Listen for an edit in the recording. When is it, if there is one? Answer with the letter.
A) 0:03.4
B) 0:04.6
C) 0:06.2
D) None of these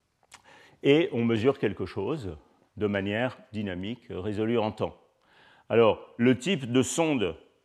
D